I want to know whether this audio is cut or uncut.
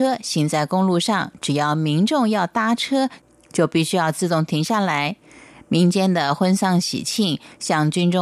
uncut